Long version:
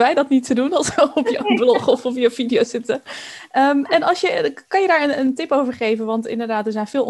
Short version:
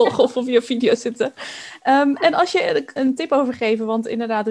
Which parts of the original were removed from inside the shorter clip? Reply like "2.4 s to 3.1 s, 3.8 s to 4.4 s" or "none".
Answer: 4.6 s to 5.2 s

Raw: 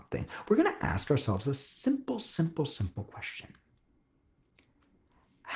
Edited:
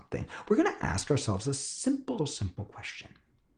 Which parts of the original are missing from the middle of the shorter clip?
2.2 s to 2.6 s

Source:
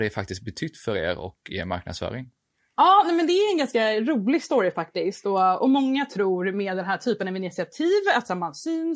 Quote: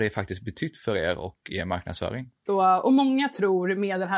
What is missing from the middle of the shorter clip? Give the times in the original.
2.5 s to 5.2 s

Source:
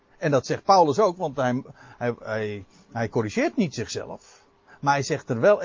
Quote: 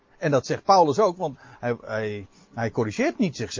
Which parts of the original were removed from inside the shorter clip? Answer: 1.3 s to 1.7 s

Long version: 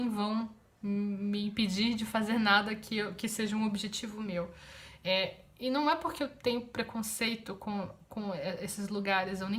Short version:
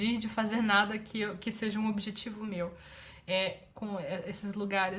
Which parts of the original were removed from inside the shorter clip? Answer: 5.5 s to 8.1 s

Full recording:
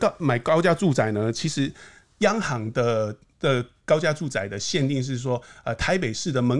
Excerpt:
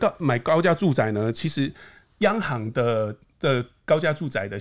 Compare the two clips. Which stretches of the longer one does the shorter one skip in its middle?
none

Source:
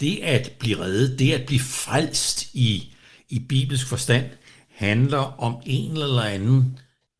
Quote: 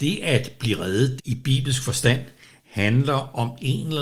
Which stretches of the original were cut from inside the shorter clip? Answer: 1.2 s to 3.2 s

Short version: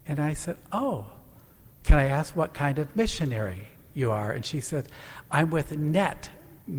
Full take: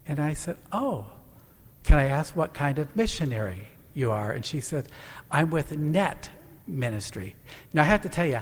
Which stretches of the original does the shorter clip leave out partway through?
none

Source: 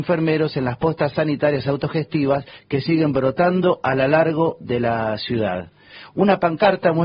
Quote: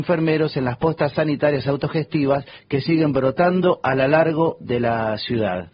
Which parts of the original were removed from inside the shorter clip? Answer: none

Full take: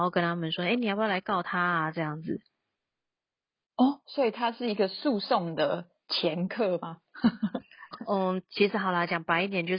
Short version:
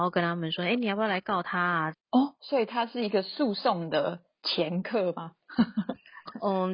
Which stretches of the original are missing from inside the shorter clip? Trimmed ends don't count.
1.9 s to 3.6 s

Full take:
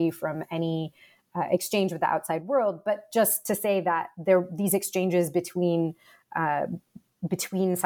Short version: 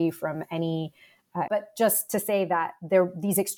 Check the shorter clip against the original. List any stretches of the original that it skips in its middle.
1.5 s to 2.8 s

